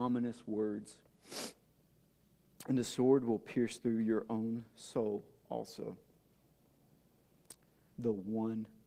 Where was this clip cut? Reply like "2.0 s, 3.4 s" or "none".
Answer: 7.9 s